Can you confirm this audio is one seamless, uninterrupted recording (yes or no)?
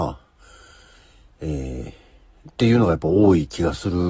yes